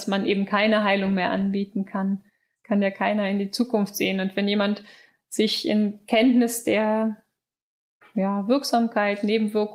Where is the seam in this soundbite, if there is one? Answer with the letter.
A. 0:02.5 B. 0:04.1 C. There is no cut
A